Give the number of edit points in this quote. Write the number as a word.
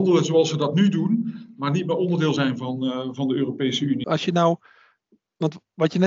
one